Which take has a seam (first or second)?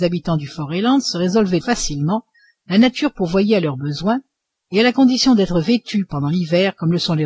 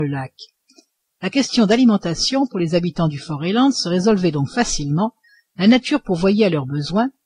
first